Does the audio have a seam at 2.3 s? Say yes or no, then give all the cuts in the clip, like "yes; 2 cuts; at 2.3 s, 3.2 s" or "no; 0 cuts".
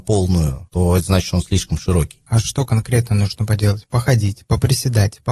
yes; 1 cut; at 2.3 s